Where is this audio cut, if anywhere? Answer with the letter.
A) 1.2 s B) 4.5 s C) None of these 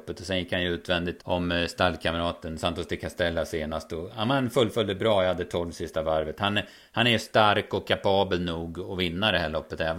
A